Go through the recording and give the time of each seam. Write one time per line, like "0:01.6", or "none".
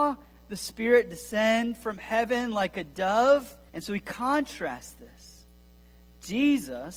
0:03.7